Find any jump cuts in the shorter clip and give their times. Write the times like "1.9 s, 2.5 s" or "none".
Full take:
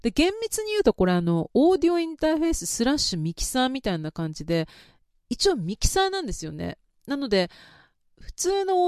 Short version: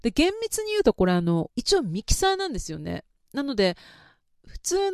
1.5 s